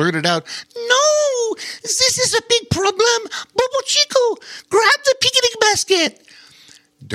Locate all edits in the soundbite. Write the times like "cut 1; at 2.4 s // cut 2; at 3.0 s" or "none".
none